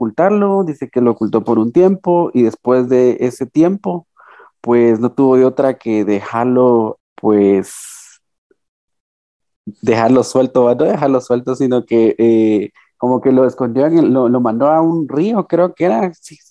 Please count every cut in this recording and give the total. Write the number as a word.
one